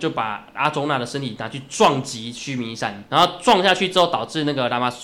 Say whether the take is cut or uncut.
cut